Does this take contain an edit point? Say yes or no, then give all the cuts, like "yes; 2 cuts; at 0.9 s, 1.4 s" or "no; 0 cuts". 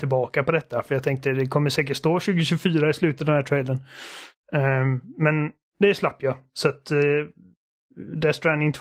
no; 0 cuts